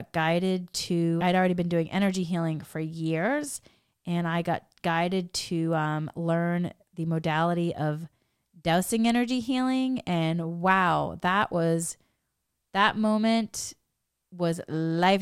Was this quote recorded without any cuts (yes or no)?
no